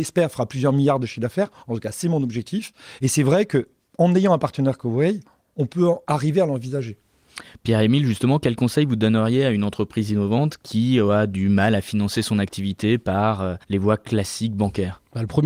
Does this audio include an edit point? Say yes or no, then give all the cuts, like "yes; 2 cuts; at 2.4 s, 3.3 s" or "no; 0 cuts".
yes; 1 cut; at 13.6 s